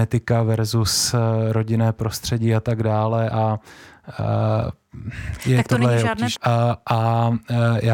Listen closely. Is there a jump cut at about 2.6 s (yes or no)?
no